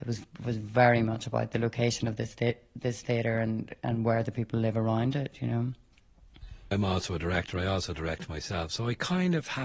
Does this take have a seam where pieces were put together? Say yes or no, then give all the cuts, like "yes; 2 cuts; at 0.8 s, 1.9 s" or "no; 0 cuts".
no; 0 cuts